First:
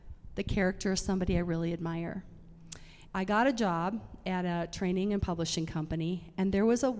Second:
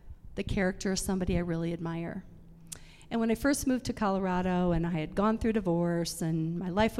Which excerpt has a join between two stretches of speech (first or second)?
first